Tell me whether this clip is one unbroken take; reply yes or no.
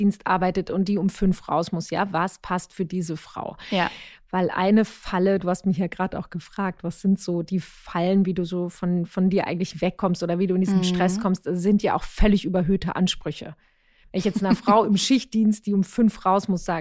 yes